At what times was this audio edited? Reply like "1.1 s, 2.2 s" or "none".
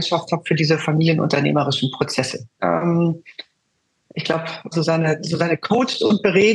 2.6 s, 4.7 s